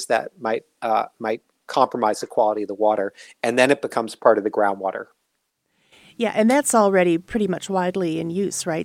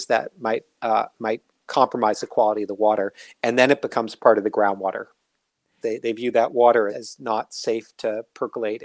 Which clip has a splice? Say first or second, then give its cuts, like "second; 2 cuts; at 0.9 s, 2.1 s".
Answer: second; 2 cuts; at 5.8 s, 6.9 s